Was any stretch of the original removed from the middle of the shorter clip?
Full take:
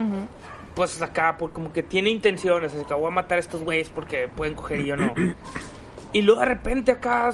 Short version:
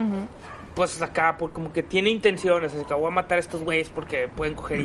no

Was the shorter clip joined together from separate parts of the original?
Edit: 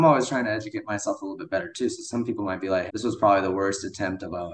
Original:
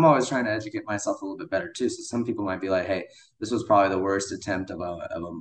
yes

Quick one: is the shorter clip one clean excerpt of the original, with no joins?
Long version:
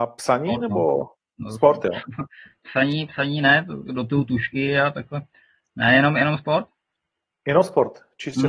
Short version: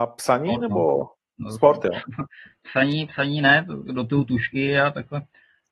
yes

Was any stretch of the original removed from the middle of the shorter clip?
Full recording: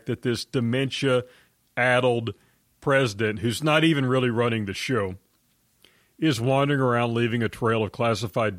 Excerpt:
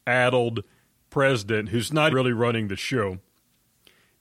yes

